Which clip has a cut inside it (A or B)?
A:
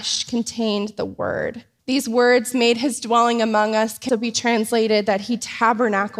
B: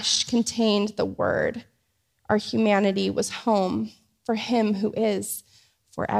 A